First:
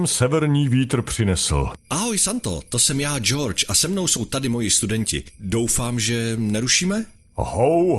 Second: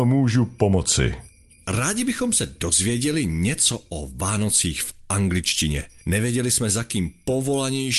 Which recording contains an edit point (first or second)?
first